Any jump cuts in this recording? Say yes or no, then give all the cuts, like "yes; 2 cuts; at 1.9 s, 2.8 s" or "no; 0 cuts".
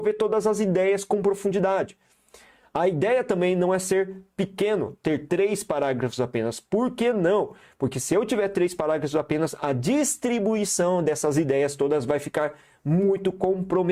no; 0 cuts